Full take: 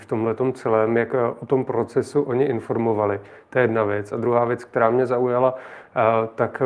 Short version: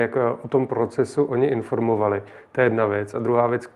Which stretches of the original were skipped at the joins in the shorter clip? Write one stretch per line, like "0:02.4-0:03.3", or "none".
none